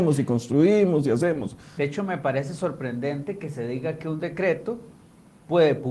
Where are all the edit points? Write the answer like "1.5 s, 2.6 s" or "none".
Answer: 1.8 s